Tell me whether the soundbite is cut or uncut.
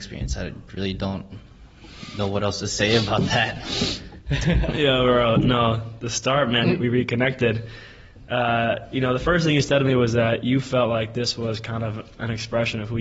cut